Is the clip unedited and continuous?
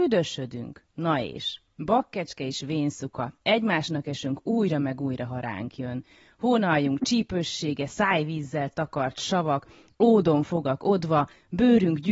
yes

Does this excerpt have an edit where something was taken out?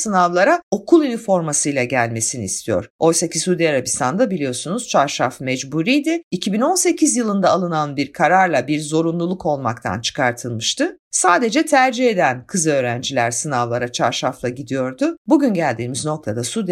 no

